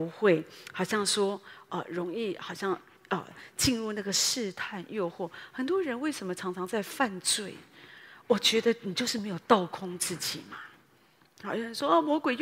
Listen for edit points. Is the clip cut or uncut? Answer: uncut